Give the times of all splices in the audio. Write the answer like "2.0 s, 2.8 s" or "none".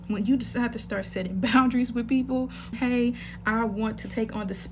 2.7 s